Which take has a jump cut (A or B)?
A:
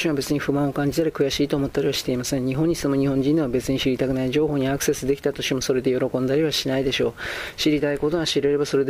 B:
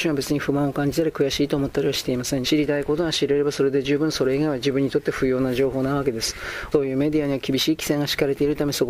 B